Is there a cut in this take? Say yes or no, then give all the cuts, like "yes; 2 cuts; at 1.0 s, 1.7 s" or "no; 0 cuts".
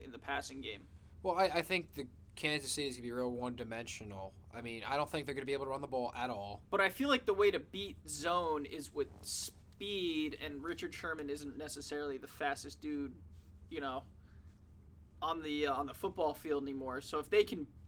yes; 1 cut; at 6.6 s